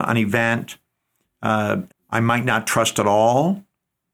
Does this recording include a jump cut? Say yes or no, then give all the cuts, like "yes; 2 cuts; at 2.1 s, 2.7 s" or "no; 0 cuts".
yes; 1 cut; at 1.9 s